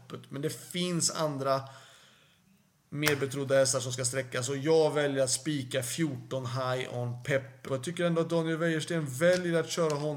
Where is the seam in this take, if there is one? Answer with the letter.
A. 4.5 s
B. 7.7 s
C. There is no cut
B